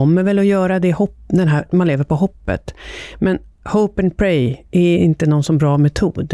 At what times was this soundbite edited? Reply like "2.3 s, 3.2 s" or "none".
1.7 s